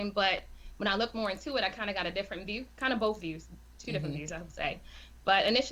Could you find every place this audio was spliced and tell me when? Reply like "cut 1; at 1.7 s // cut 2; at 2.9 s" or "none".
none